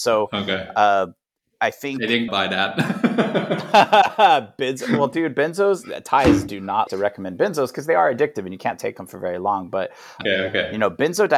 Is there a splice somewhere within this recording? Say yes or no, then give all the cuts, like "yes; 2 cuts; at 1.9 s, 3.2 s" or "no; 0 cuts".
yes; 3 cuts; at 2.3 s, 6.9 s, 10.2 s